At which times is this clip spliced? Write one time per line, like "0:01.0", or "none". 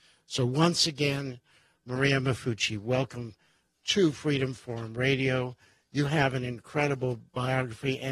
none

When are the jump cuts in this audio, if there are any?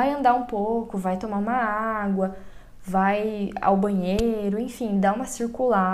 none

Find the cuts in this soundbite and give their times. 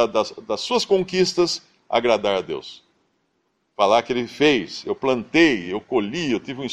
none

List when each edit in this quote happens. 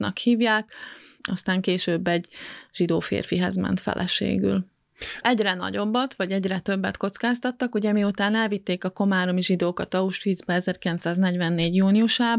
0:01.2
0:05.2

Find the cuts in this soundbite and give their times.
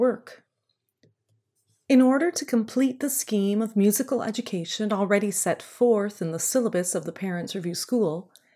none

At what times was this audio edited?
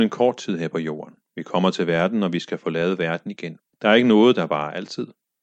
0:03.7

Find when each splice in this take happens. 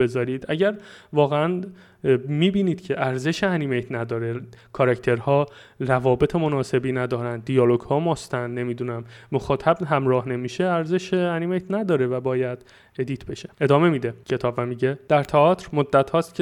0:13.5

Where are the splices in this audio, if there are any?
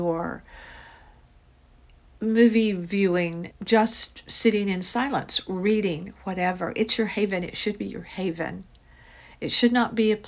0:03.5

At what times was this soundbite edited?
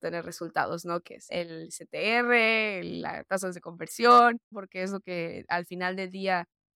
0:01.3
0:04.5

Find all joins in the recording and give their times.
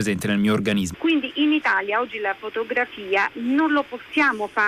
0:00.9

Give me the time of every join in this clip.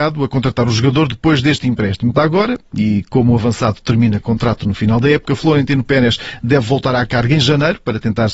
0:02.1

